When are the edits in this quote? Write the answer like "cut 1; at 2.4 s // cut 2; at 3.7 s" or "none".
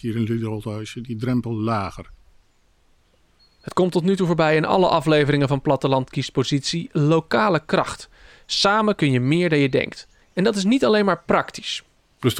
cut 1; at 10.2 s